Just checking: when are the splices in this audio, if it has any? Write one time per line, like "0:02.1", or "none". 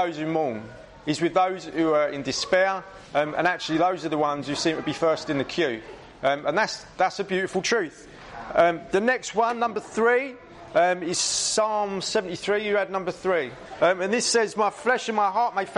0:13.8